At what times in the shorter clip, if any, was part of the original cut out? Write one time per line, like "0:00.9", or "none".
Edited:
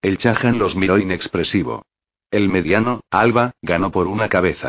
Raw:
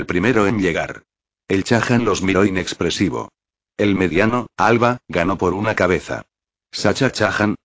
none